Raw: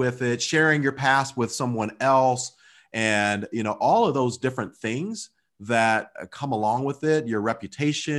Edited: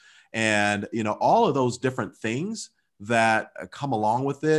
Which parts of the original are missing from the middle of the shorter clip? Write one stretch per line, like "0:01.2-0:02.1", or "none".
none